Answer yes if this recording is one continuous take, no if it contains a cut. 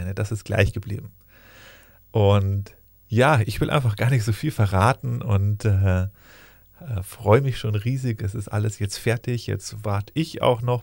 yes